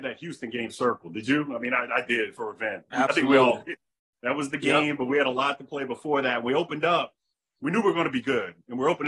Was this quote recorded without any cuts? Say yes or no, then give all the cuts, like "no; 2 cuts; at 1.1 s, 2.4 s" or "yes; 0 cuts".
yes; 0 cuts